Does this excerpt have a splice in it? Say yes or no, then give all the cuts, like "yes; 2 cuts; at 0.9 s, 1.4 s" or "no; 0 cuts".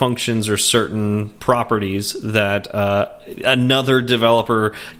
no; 0 cuts